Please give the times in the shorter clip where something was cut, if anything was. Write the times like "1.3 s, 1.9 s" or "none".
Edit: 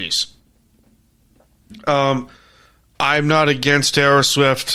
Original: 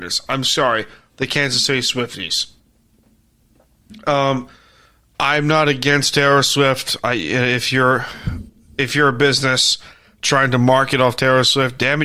none